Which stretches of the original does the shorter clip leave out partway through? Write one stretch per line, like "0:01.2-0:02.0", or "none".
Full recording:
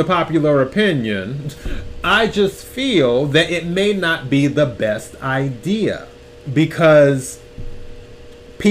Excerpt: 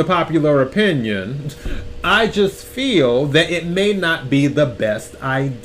none